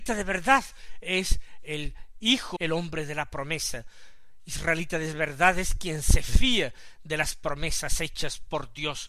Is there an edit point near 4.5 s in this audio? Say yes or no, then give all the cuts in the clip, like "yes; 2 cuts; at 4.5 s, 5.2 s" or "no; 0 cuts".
no; 1 cut; at 2.6 s